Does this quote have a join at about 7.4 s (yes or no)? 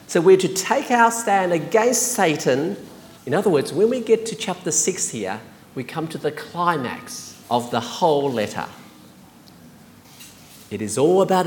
yes